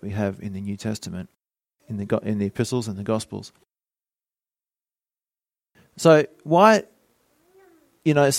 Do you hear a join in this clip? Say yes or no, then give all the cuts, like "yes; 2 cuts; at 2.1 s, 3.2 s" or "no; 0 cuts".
no; 0 cuts